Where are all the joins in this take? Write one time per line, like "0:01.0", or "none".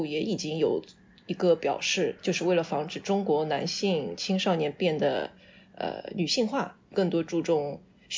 0:02.2
0:06.9